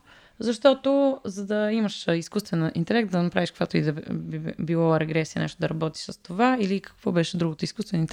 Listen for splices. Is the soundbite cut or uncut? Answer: uncut